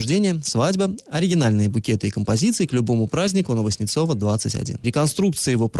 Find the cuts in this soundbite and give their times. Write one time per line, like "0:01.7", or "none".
0:04.8